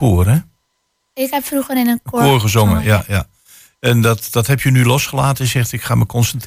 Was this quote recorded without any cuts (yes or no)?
yes